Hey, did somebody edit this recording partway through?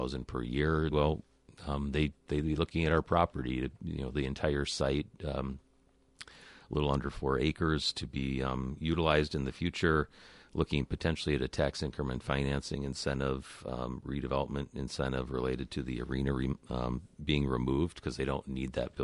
yes; 1 cut; at 0.9 s

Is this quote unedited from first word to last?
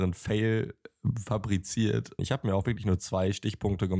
no; 1 cut; at 2.2 s

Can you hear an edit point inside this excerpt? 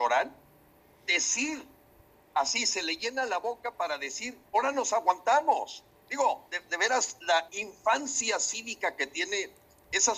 yes; 3 cuts; at 4.5 s, 6.5 s, 7.5 s

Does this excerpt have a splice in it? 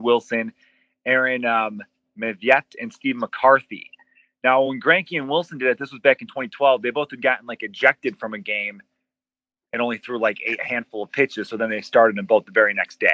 no; 0 cuts

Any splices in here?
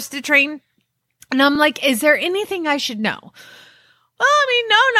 no; 0 cuts

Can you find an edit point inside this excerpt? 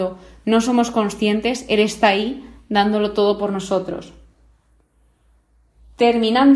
no; 0 cuts

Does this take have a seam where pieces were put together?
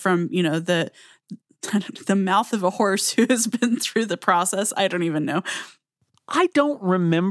no; 0 cuts

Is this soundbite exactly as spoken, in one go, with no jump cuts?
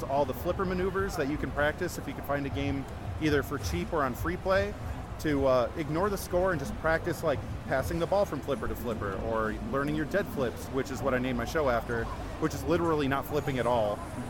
yes; 0 cuts

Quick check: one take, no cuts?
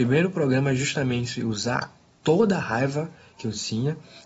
yes; 0 cuts

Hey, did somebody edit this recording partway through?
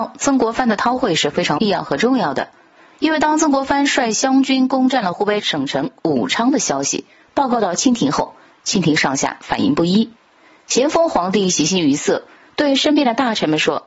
yes; 1 cut; at 5.4 s

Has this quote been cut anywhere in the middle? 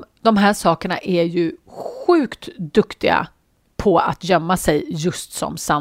no; 0 cuts

